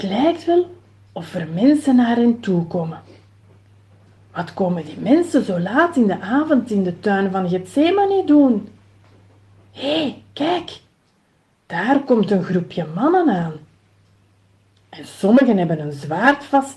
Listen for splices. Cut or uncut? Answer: uncut